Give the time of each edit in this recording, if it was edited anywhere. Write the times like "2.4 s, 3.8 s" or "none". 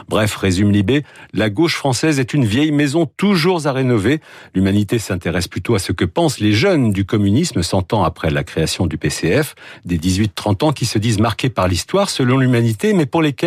none